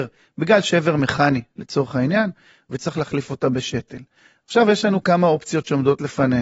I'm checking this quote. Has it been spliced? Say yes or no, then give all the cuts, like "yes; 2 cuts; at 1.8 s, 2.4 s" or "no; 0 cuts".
no; 0 cuts